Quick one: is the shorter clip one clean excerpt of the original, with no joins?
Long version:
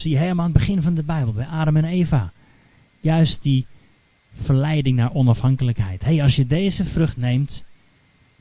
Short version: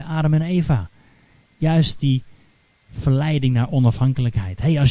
yes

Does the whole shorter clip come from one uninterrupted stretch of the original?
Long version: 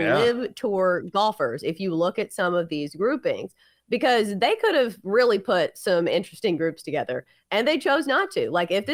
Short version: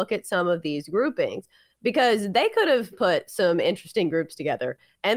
no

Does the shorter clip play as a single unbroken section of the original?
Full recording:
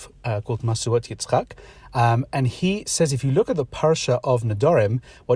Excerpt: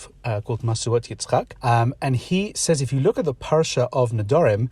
no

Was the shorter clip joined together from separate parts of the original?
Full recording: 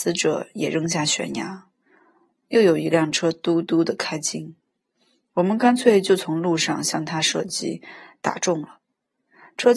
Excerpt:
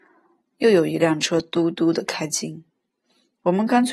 no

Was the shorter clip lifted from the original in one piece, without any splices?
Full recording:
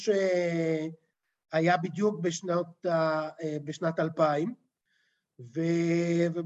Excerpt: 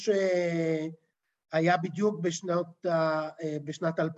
yes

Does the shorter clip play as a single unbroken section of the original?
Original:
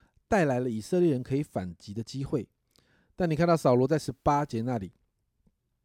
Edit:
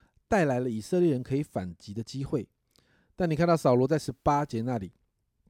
yes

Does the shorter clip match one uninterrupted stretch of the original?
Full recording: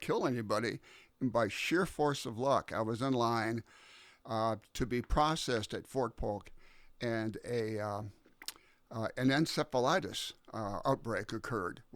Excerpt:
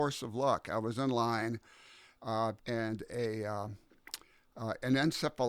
no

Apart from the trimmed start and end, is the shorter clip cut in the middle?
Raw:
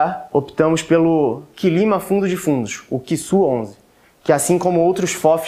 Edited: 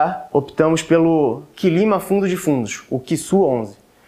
no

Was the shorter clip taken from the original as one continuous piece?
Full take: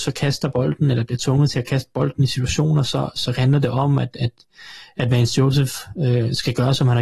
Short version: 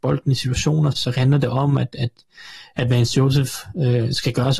no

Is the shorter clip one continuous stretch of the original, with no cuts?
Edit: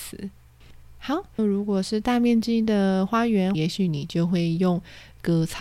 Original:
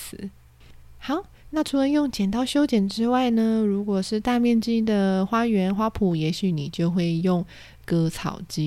no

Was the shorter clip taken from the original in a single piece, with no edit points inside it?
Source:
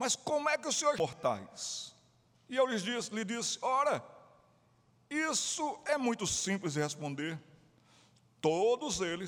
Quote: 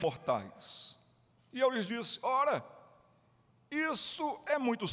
no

